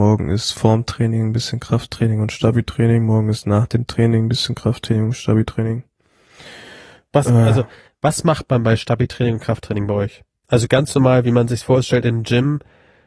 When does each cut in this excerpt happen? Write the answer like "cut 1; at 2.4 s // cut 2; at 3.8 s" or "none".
none